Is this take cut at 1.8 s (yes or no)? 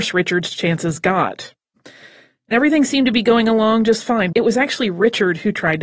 yes